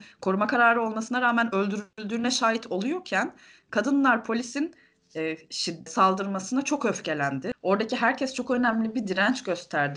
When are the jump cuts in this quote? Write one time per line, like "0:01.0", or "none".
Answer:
0:05.9
0:07.5

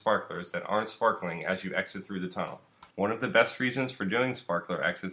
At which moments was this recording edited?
0:02.9

